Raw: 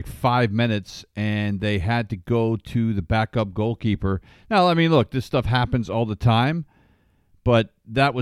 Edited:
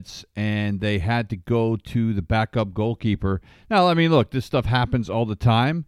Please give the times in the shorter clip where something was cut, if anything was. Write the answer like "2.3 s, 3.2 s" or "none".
none